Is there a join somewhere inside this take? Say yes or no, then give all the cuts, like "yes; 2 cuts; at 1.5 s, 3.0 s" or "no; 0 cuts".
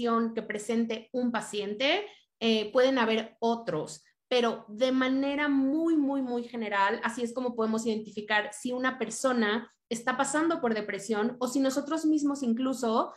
no; 0 cuts